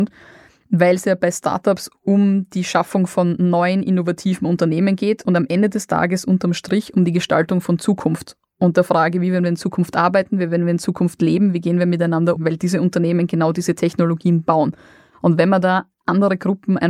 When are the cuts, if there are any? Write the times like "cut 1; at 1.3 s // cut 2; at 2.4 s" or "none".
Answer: cut 1; at 12.4 s